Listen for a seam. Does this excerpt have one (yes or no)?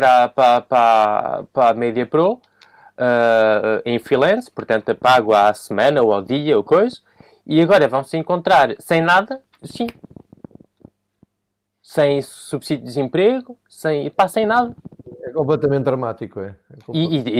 yes